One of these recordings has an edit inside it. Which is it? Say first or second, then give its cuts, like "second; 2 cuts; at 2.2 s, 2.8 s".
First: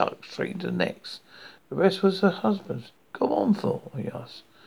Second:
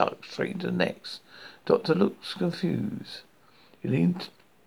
first; 2 cuts; at 1.6 s, 3.0 s